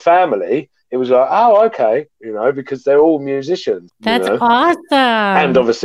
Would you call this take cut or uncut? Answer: cut